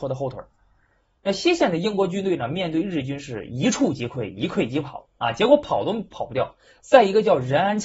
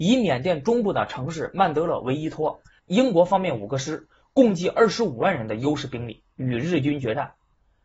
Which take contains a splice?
second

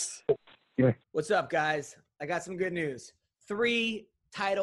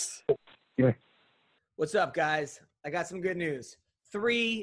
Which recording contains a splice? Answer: first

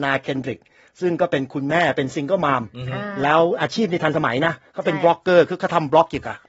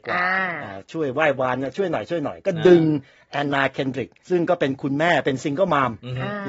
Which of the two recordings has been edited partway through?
second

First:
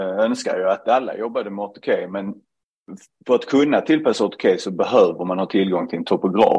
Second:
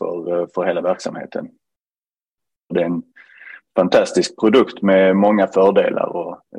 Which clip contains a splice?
second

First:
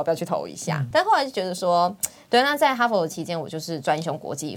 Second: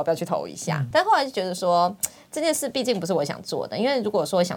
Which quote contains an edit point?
first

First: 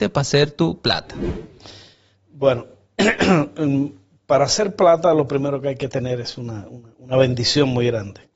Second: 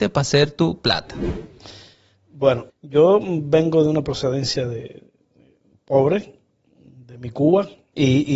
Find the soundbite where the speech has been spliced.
second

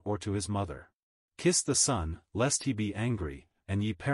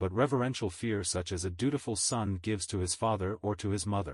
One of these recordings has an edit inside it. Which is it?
first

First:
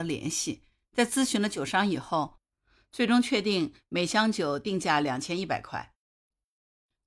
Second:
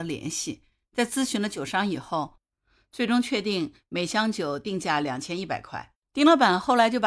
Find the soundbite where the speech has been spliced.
second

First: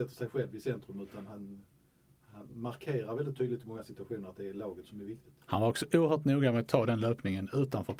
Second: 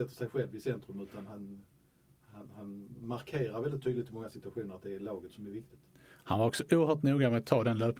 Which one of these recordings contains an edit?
first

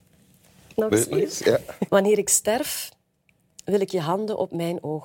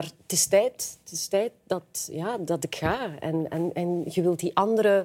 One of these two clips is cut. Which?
first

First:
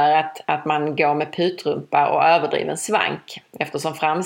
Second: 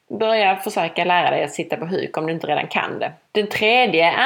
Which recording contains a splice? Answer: second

